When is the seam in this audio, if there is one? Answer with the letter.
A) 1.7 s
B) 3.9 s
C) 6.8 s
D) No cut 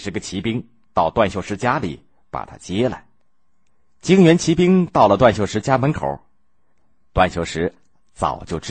D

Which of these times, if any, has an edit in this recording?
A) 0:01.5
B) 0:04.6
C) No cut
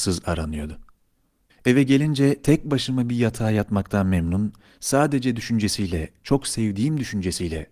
A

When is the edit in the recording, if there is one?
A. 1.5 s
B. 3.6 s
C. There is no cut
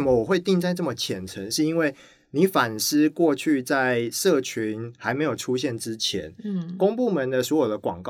C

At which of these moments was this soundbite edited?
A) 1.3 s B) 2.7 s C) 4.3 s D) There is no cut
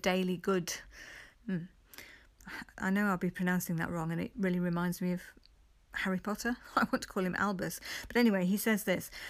A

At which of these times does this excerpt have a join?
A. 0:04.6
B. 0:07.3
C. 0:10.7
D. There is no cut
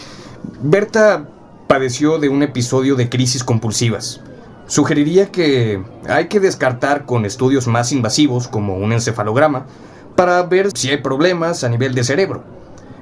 C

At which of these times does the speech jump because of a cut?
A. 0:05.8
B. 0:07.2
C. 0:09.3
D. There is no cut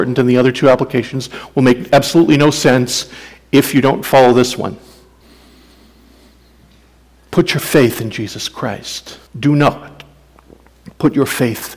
C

